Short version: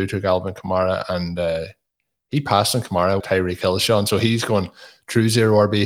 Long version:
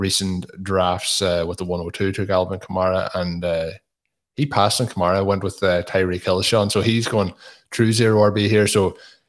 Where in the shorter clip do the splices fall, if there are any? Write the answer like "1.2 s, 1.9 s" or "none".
3.2 s